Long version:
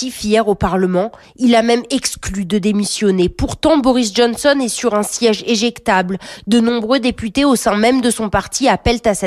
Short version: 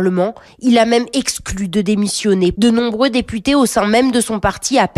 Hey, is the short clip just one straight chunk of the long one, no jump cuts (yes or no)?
no